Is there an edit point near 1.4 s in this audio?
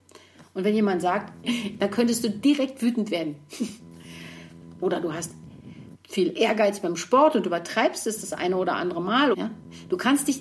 yes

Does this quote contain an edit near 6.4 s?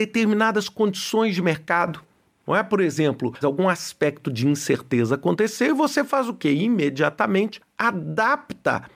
no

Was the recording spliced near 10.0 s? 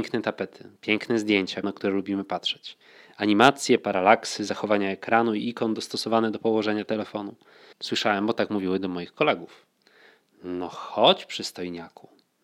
no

